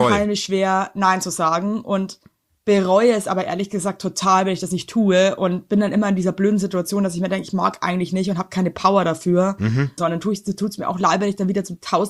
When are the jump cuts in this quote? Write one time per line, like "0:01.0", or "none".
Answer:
0:10.0